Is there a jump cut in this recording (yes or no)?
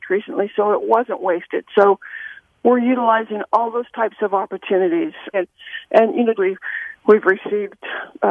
yes